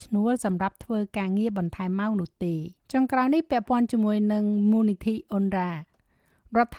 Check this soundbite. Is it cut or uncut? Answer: cut